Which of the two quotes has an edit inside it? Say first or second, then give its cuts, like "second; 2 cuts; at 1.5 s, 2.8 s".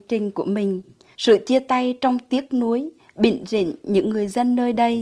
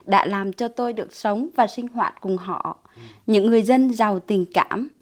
first; 1 cut; at 1.1 s